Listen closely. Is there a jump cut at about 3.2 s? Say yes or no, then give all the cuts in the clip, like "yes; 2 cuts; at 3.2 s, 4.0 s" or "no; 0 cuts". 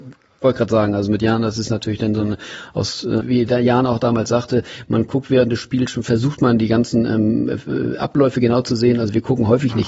yes; 1 cut; at 3.2 s